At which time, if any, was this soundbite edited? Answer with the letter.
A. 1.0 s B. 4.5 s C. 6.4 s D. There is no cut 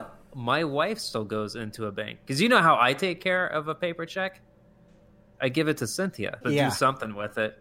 C